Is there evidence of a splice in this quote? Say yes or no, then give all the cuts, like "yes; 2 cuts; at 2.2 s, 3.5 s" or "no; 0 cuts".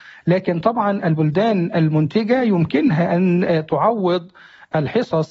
no; 0 cuts